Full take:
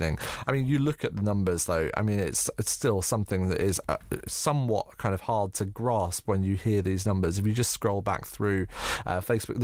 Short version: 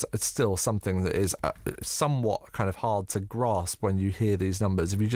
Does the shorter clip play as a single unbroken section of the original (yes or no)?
yes